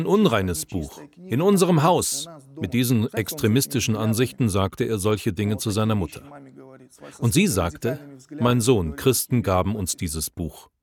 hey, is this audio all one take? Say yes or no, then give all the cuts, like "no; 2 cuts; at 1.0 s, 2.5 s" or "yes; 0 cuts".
yes; 0 cuts